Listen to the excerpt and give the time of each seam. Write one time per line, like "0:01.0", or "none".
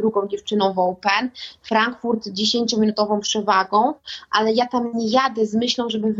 none